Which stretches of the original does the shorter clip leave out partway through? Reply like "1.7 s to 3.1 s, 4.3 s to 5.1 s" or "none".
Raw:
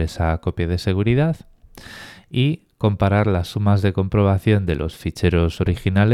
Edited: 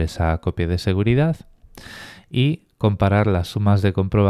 none